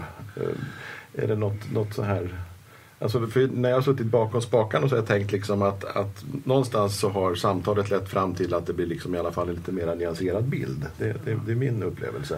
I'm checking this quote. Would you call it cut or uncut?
uncut